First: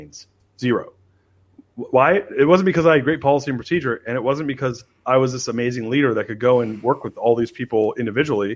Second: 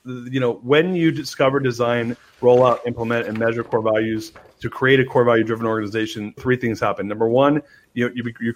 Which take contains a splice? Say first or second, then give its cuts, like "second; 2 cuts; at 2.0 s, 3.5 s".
second; 1 cut; at 6.4 s